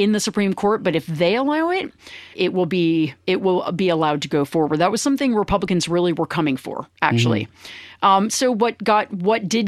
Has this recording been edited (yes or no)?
yes